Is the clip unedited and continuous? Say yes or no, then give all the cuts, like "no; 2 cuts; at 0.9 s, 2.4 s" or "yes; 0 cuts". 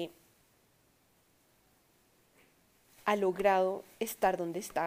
yes; 0 cuts